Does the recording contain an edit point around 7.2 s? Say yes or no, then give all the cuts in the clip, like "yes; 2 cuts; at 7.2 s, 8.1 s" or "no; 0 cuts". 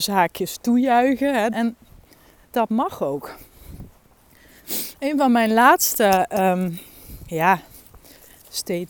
no; 1 cut; at 1.5 s